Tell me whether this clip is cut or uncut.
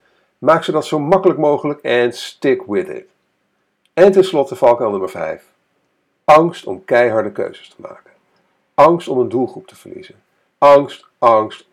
cut